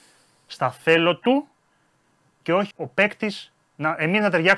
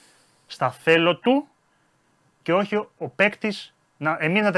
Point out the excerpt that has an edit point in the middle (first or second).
first